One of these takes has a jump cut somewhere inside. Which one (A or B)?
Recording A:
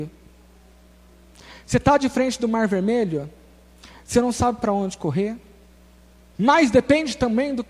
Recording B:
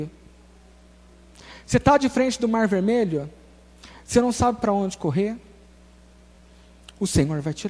A